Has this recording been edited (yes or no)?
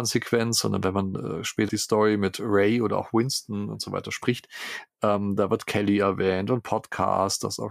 yes